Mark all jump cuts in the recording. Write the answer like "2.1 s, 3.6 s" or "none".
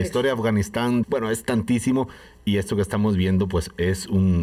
1.0 s